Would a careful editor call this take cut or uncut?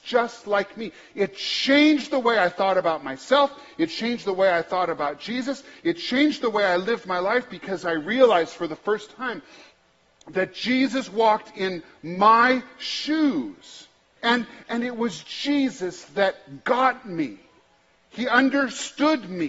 cut